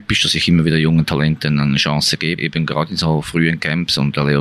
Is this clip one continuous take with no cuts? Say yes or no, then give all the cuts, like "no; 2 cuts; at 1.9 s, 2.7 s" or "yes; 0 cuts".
no; 1 cut; at 2.4 s